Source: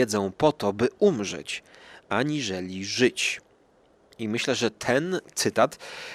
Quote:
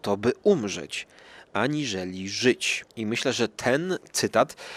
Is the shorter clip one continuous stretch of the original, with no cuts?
no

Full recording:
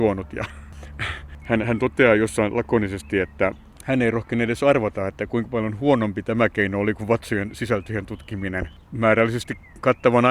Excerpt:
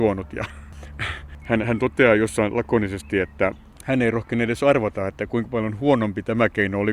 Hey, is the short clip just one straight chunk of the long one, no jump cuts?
yes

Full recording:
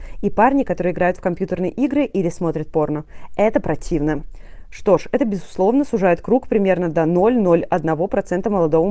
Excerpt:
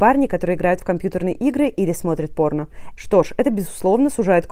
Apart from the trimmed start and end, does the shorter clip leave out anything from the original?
yes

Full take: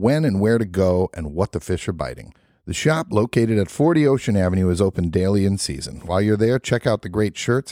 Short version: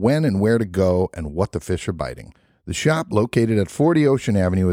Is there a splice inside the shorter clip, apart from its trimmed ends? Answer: no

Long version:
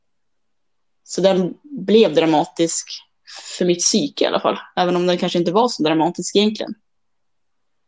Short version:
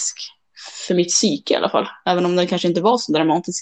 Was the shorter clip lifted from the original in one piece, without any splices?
yes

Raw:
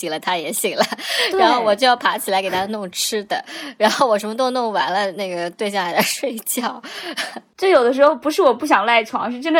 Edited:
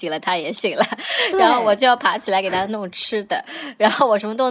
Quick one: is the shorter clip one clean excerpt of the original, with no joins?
yes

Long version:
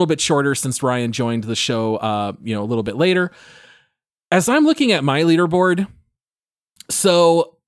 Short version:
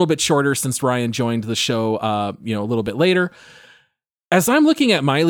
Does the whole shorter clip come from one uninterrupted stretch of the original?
yes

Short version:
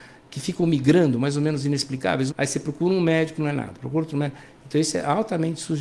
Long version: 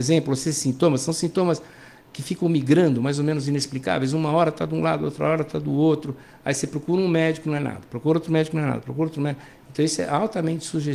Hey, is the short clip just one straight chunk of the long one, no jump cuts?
no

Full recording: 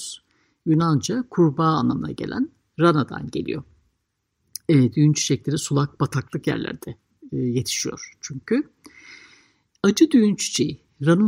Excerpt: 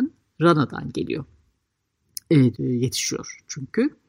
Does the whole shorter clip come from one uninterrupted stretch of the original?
no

